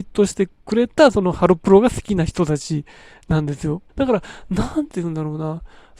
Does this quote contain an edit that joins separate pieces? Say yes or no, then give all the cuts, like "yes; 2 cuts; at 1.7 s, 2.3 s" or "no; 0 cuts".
yes; 1 cut; at 3.9 s